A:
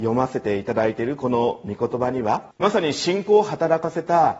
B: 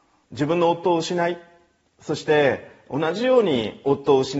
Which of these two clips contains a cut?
A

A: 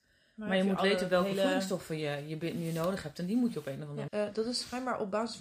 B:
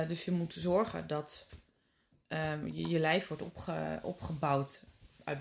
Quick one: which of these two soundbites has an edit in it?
A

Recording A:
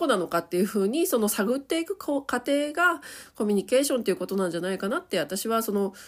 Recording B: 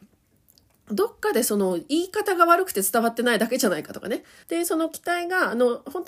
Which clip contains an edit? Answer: B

